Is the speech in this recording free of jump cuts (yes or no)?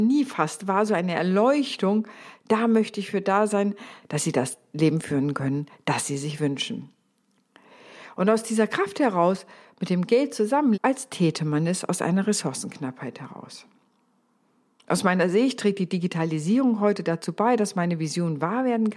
no